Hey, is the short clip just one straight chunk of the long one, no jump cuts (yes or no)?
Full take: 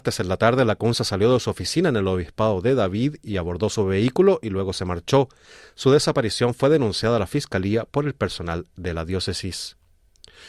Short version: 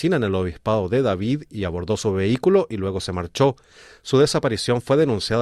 yes